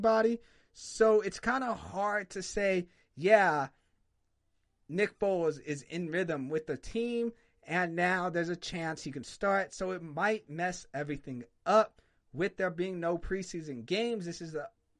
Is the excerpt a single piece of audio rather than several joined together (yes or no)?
yes